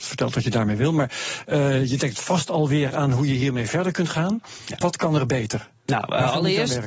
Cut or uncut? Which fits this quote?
cut